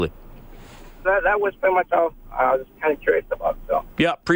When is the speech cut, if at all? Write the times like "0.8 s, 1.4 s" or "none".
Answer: 1.0 s